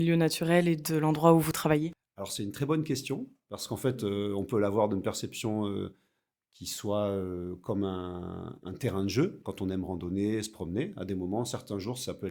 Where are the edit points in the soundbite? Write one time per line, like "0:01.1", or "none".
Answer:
none